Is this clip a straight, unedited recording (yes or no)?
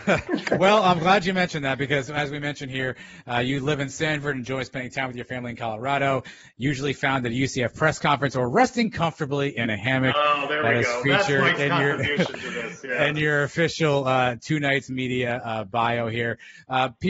yes